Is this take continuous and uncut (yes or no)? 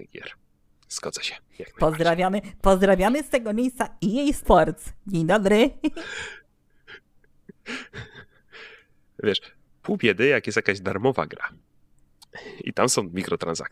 yes